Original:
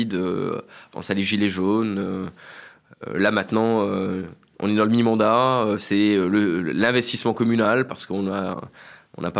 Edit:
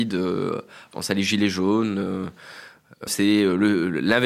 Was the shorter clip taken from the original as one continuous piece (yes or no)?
no